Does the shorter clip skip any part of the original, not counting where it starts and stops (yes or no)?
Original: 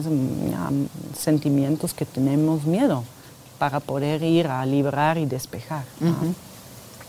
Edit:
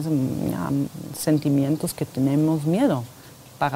no